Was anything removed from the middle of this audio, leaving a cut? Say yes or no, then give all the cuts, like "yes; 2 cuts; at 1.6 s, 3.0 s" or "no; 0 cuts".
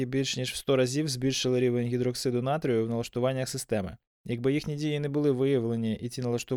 no; 0 cuts